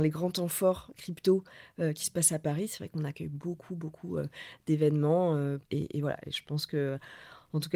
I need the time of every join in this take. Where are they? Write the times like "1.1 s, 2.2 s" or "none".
5.6 s